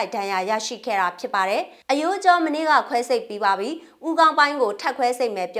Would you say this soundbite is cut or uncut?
cut